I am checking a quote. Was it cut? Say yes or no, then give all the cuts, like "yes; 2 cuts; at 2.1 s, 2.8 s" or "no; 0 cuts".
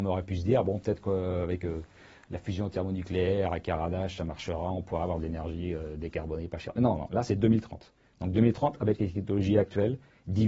no; 0 cuts